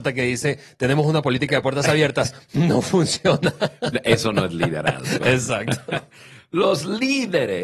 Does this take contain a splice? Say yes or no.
no